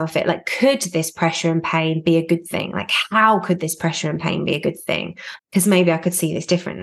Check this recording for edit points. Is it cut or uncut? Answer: cut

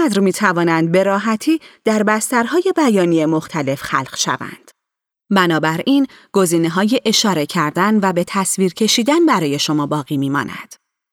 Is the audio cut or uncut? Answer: cut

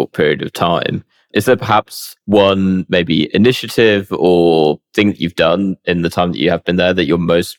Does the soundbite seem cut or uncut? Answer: cut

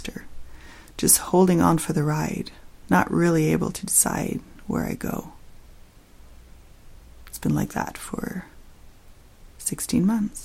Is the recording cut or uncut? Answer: uncut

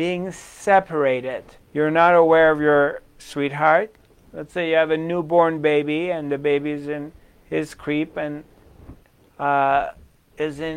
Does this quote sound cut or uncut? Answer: cut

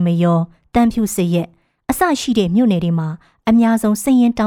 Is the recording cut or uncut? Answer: uncut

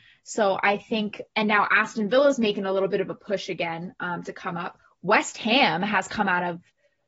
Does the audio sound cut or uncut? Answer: cut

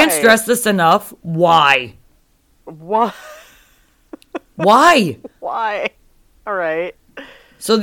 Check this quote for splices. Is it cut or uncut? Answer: uncut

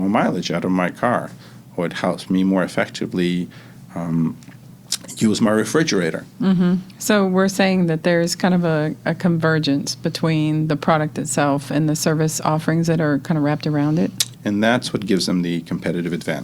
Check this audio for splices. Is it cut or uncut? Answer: cut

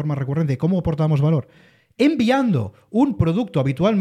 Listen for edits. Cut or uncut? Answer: uncut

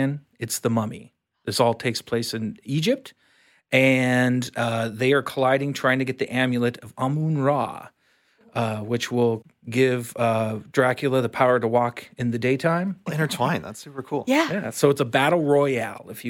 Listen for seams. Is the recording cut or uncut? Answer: cut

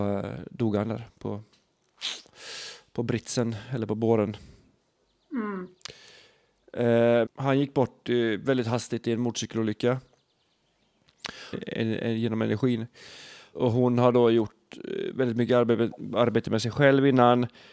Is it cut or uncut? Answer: cut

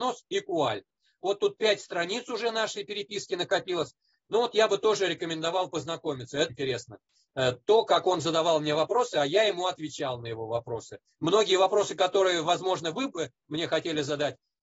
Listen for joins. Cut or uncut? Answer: cut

